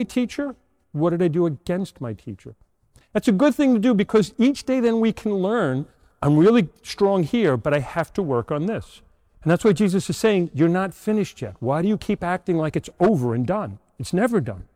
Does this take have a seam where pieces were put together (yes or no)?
no